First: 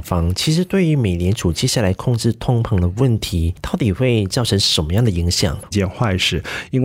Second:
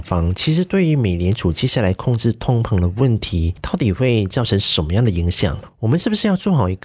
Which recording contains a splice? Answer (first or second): first